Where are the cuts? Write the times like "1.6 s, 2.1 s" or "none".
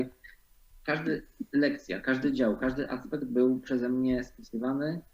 1.5 s